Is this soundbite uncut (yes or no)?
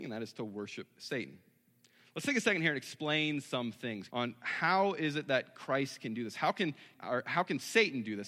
no